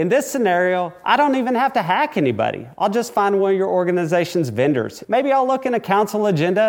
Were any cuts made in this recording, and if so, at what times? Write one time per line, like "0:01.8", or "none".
0:05.0